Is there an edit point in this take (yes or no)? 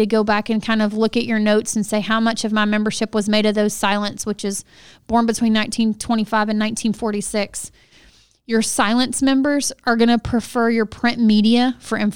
no